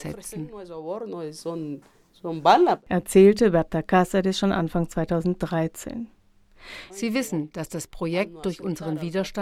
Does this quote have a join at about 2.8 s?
no; 1 cut; at 6.9 s

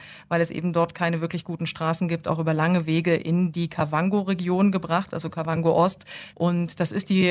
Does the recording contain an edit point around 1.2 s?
no; 1 cut; at 6.3 s

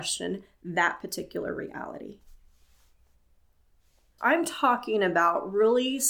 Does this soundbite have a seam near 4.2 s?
yes; 1 cut; at 4.2 s

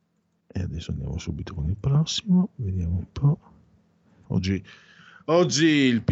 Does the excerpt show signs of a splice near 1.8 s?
no; 1 cut; at 4.2 s

